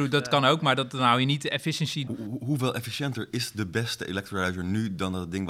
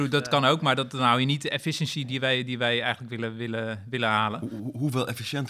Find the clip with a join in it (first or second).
first